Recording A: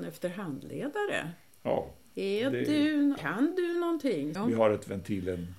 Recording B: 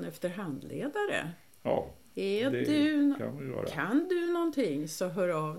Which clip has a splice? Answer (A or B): A